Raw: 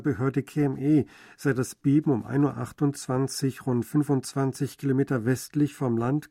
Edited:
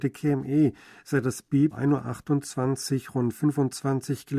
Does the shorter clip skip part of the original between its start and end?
yes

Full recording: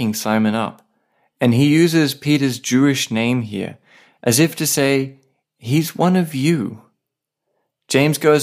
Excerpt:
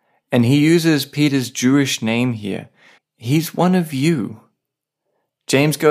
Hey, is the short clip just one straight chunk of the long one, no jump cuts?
no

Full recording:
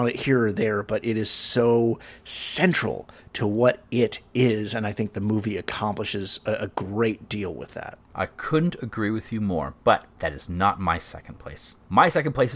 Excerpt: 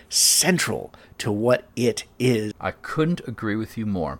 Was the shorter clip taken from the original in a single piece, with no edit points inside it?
no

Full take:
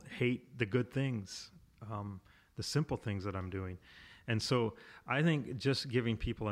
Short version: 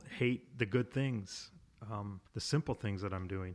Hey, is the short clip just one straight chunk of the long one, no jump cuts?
no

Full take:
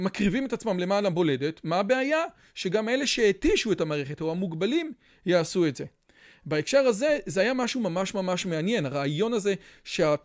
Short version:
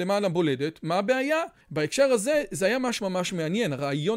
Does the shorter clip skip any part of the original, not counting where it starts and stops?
yes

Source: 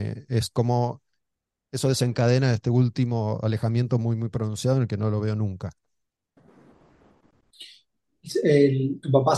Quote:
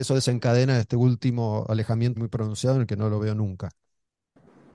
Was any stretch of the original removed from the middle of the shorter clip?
yes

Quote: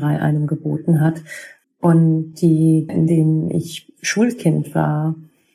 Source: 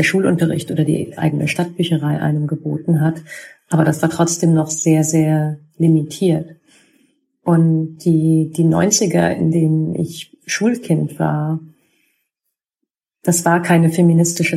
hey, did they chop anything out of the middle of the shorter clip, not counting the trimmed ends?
yes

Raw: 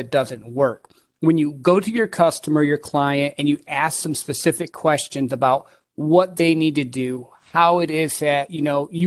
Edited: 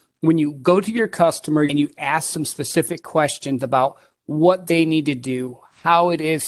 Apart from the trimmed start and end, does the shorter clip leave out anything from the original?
yes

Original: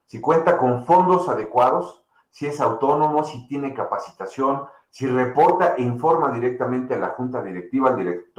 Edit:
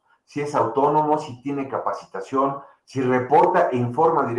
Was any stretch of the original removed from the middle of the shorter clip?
no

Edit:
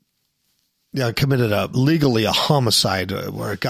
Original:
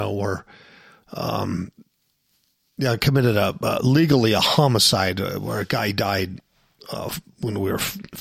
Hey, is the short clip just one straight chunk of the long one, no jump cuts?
no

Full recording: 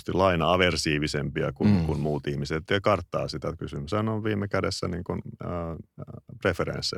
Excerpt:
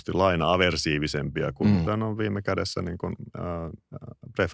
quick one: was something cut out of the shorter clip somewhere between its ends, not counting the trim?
yes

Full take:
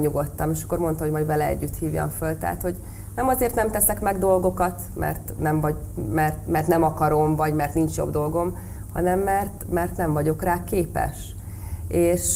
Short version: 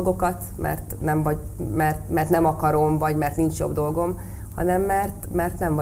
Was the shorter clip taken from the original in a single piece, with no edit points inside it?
yes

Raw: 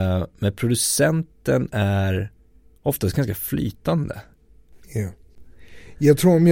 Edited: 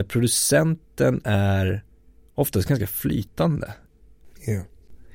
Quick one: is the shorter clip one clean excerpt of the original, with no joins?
yes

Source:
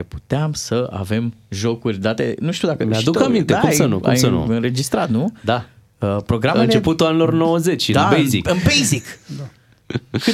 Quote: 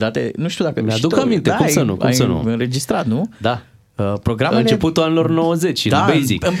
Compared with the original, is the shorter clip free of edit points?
yes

